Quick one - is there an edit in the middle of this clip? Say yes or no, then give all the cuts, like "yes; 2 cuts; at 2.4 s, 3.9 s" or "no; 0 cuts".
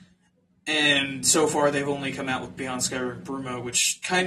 no; 0 cuts